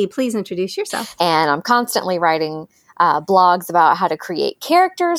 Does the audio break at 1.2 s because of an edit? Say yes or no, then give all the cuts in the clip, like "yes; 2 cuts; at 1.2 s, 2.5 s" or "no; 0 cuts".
yes; 1 cut; at 1.2 s